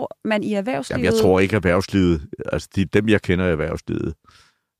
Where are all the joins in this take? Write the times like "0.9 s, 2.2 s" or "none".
none